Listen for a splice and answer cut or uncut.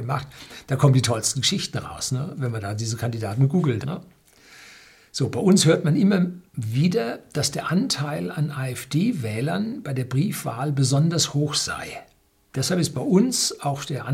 cut